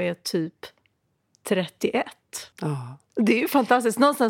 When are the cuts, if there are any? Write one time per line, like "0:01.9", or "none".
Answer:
0:02.5